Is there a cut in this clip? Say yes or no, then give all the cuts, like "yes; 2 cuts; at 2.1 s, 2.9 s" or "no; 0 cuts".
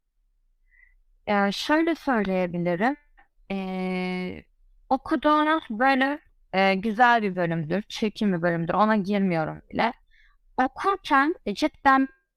no; 0 cuts